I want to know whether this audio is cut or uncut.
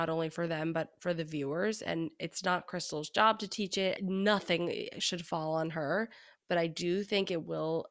cut